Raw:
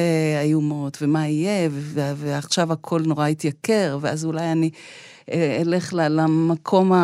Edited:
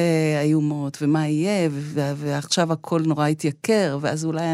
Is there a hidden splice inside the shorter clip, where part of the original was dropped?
no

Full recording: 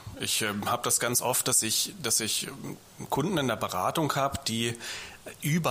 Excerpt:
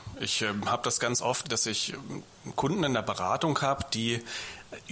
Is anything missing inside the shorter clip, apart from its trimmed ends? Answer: yes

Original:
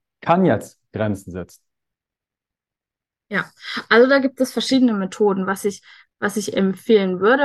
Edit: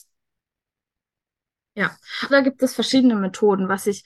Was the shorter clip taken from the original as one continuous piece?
no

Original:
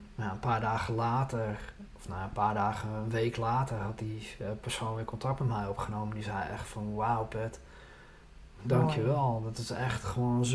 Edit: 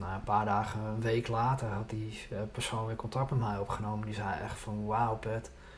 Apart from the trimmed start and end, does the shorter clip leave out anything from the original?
no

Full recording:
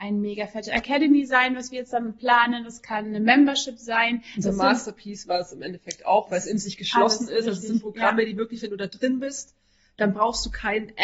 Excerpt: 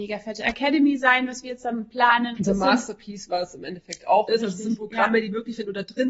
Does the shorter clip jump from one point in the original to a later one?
yes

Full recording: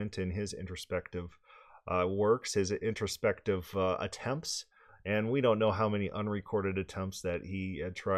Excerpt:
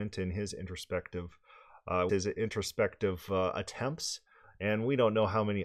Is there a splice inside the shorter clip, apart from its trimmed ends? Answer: yes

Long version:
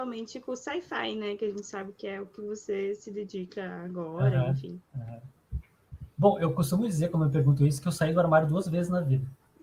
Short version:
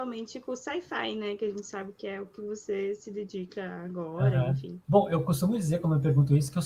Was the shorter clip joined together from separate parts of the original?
yes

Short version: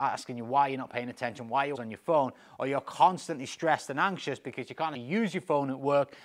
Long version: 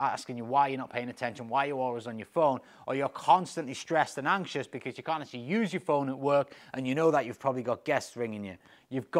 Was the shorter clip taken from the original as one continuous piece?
no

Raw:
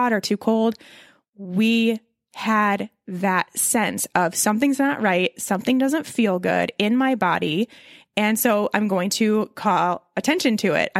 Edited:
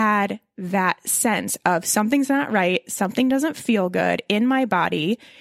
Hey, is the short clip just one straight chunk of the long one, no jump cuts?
yes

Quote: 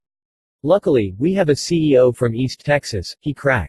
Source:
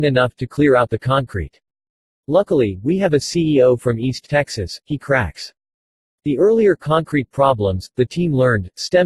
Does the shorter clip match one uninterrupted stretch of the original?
yes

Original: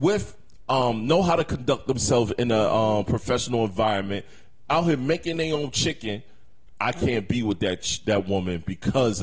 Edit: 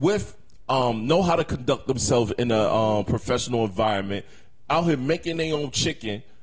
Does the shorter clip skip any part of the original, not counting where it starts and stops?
no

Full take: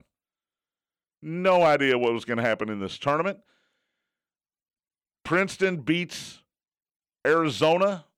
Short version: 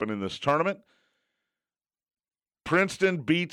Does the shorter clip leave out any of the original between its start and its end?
no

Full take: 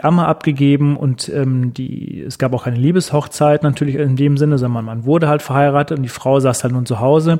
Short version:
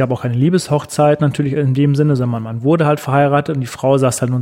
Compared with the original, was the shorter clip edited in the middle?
no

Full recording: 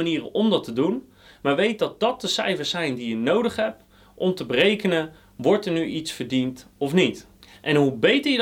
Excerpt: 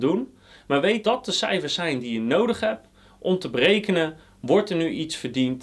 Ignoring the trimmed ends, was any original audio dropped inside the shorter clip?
yes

